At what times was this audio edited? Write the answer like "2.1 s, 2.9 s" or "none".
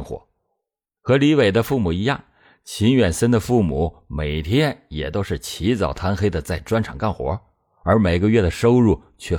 1.0 s